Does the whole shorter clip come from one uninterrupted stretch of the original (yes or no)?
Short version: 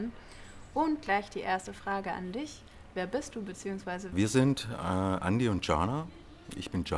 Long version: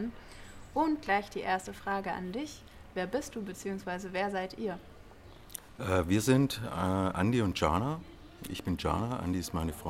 no